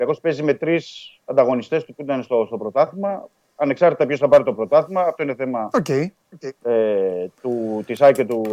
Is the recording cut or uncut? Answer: uncut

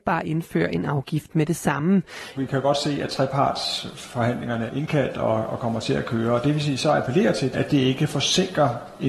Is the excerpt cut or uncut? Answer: cut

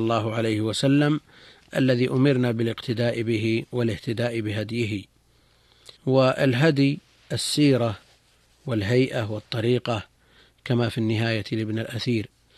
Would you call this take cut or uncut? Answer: cut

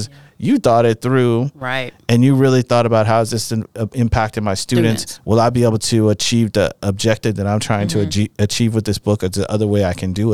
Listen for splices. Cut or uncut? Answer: uncut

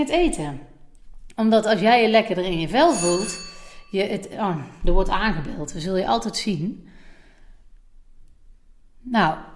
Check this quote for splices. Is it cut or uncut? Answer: uncut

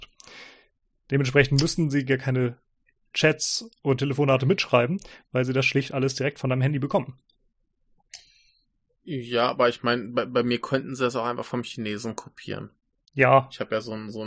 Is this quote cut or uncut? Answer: uncut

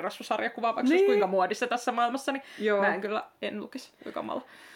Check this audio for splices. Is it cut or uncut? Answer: uncut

